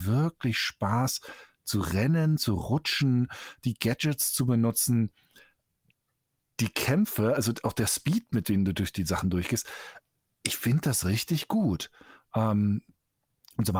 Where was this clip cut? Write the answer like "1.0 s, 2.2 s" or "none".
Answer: 2.4 s